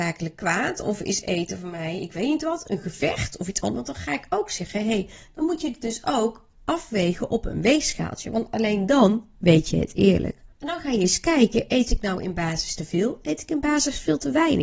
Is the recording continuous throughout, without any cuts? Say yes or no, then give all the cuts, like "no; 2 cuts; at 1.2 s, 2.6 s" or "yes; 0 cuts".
no; 2 cuts; at 3.8 s, 10.5 s